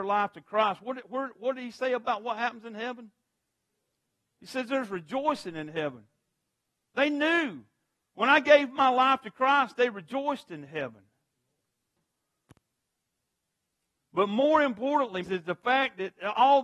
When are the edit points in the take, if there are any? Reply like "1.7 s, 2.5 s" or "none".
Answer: 15.2 s